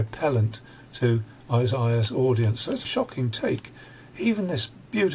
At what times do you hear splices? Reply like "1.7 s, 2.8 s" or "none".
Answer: 2.8 s